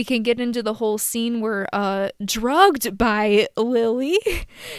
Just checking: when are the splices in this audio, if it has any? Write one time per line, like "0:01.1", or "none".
0:02.2